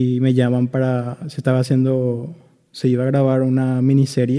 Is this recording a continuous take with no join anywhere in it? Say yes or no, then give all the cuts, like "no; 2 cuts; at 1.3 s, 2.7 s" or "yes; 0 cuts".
yes; 0 cuts